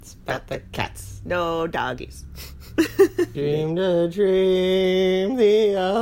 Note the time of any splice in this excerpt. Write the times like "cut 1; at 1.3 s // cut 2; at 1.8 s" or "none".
cut 1; at 3.3 s